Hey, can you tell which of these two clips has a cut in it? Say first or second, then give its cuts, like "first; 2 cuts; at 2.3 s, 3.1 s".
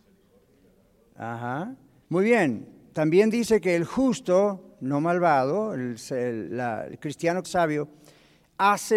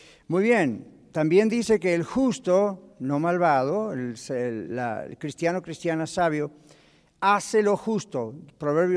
first; 2 cuts; at 2.0 s, 7.4 s